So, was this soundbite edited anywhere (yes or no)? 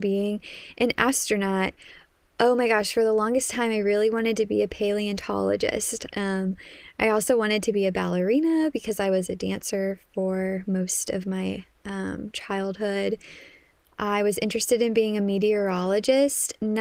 yes